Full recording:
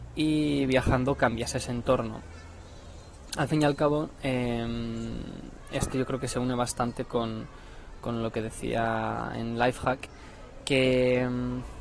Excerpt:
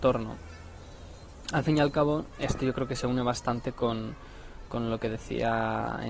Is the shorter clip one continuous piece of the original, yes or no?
no